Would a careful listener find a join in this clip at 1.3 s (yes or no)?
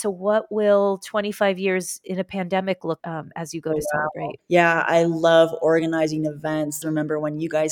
no